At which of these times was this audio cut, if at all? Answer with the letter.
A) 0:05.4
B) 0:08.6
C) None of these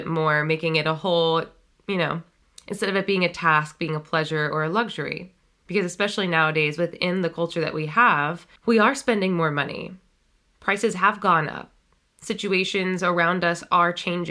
B